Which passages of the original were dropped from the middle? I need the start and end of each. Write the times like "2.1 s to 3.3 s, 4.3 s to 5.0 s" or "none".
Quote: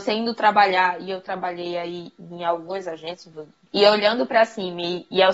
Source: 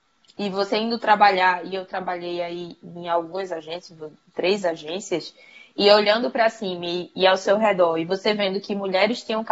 4.3 s to 5.7 s